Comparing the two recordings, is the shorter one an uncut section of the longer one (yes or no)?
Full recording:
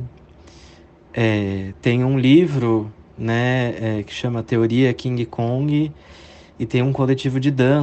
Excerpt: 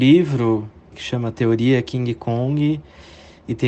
no